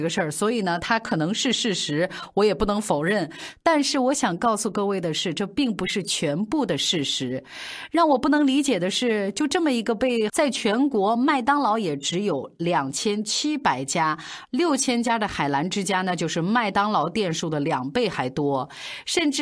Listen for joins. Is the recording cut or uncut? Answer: cut